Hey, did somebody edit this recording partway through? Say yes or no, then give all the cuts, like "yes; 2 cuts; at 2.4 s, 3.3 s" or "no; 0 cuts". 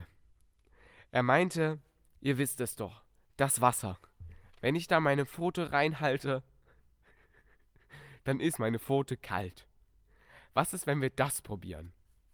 yes; 1 cut; at 2.2 s